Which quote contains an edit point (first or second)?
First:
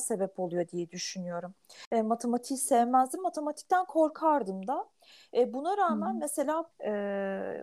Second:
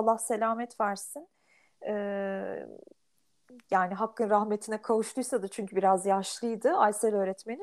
first